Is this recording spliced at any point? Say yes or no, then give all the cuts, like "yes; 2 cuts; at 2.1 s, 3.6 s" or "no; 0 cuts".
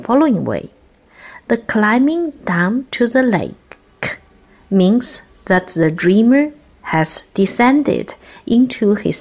no; 0 cuts